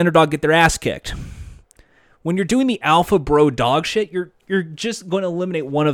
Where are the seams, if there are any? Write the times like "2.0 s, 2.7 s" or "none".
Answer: none